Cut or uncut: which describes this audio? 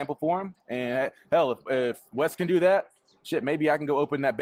uncut